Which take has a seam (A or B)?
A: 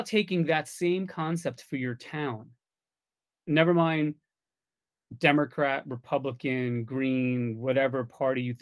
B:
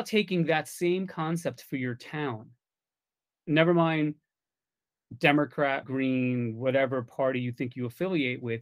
B